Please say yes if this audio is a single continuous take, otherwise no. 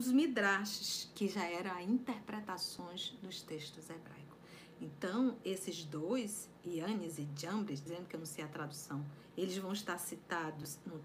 no